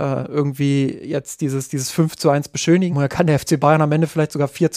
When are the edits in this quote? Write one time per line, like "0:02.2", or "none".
0:02.9